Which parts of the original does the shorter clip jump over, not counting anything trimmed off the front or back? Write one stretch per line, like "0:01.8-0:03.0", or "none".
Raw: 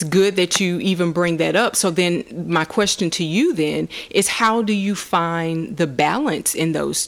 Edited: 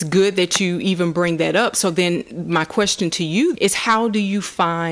0:03.5-0:04.1